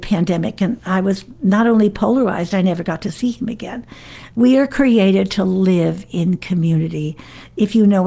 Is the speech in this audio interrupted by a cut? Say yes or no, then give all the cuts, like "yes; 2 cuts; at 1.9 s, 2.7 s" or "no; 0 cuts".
yes; 1 cut; at 4.3 s